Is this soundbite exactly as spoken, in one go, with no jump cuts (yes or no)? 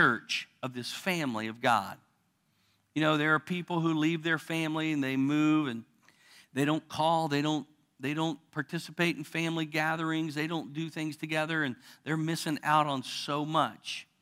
yes